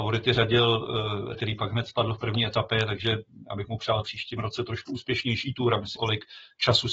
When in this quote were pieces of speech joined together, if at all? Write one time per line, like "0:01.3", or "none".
0:01.3
0:06.0